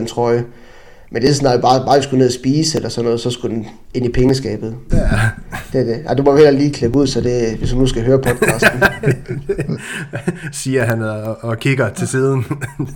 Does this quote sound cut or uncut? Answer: cut